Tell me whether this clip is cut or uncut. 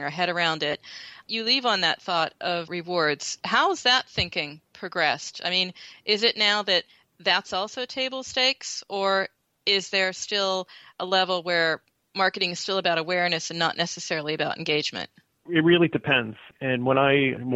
uncut